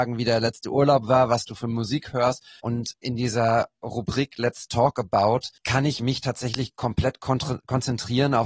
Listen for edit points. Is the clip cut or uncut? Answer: cut